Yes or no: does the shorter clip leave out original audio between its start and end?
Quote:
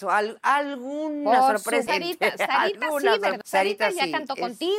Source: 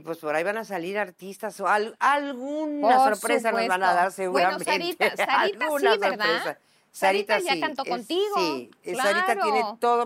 yes